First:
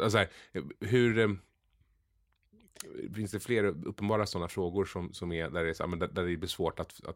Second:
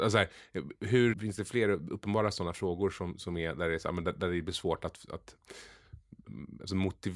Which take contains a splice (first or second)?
second